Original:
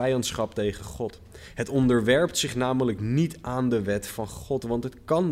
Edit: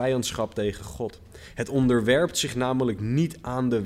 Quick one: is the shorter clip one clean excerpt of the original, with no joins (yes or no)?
yes